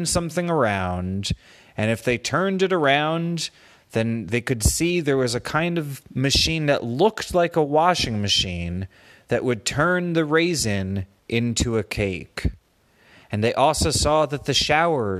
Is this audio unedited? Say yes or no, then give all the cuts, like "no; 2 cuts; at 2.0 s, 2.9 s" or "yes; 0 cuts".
no; 1 cut; at 13.2 s